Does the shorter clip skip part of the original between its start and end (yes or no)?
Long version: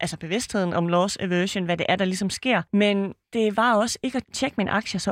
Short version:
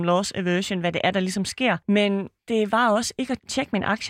no